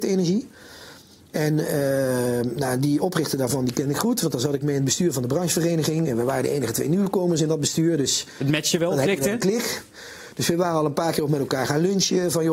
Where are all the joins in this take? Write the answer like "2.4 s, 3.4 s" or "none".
none